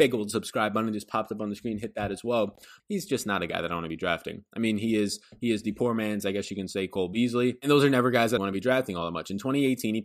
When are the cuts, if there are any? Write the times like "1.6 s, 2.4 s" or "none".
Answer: 2.8 s, 8.4 s

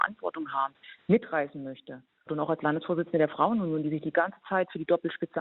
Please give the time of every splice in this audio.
2.3 s

